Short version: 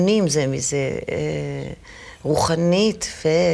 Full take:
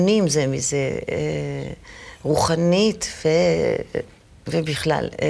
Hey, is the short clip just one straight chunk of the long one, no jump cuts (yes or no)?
yes